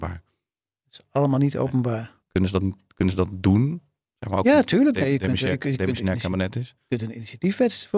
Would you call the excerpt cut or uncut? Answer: cut